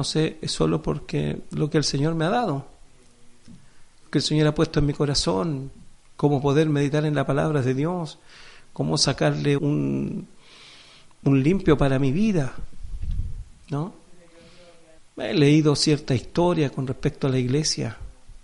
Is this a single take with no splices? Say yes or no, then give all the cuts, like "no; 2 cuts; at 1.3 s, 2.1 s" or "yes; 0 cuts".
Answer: no; 2 cuts; at 9.6 s, 15.0 s